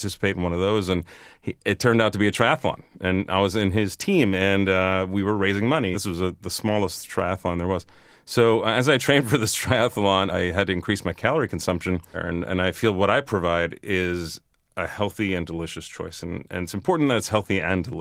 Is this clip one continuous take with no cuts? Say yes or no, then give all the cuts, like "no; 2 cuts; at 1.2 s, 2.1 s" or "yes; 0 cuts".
no; 3 cuts; at 5.9 s, 10.3 s, 12.1 s